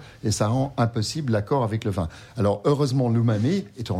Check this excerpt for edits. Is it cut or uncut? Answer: uncut